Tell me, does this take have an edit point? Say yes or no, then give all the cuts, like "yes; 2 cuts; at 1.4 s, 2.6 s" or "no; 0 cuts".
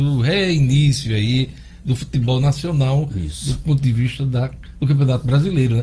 no; 0 cuts